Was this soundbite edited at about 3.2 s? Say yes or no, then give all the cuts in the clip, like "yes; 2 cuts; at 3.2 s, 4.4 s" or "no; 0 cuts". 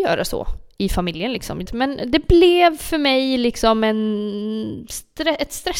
no; 1 cut; at 1.7 s